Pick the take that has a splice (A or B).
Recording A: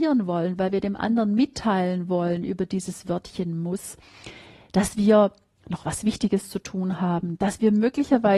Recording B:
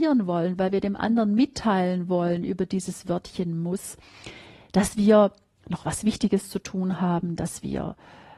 A